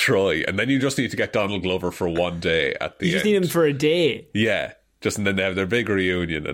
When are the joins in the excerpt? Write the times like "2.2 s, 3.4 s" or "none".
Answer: none